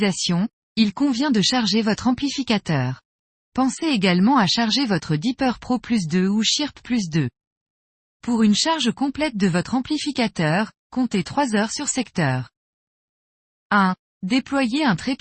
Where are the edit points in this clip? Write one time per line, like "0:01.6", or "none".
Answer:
none